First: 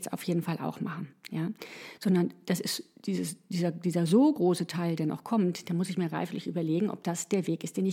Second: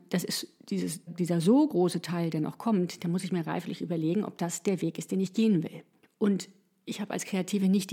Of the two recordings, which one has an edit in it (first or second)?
second